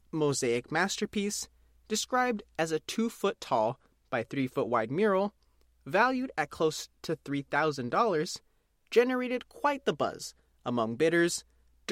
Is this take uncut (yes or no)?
yes